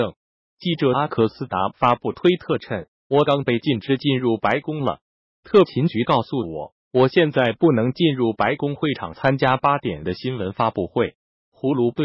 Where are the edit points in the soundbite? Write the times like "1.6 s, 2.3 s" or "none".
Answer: 3.3 s